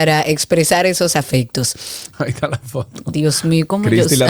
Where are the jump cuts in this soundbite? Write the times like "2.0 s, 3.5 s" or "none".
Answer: 2.1 s

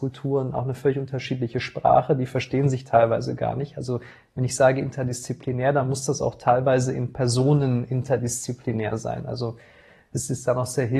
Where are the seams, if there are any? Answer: none

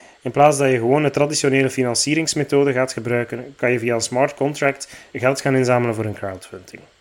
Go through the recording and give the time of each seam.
5.1 s

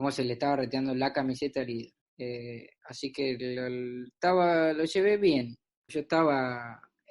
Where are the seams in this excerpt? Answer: 2.0 s, 5.9 s

